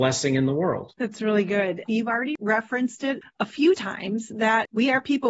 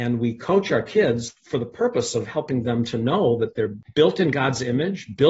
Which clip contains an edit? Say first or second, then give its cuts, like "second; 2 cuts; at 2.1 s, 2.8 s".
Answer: first; 1 cut; at 1.8 s